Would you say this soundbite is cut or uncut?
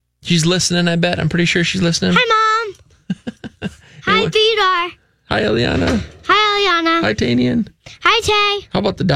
uncut